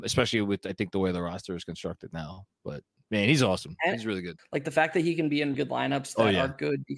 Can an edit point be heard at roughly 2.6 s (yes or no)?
no